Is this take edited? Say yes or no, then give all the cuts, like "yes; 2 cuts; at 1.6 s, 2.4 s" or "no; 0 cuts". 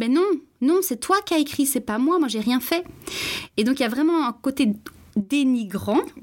no; 0 cuts